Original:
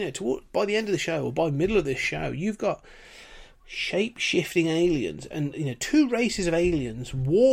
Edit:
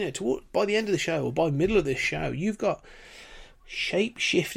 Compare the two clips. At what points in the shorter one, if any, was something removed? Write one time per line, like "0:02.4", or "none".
none